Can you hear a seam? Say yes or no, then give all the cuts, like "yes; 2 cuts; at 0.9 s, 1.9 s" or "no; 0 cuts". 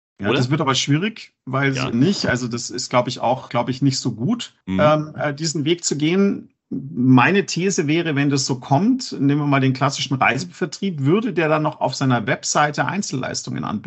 yes; 2 cuts; at 1.9 s, 3.5 s